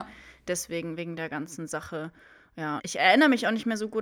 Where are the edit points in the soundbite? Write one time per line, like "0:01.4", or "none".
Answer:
0:02.8